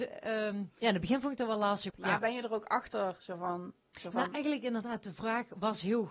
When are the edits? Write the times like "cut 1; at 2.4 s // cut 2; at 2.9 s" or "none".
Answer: cut 1; at 1.9 s // cut 2; at 3.9 s